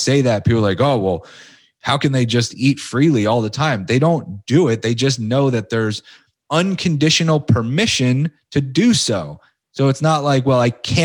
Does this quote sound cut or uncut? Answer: uncut